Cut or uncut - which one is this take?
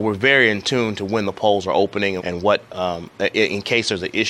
cut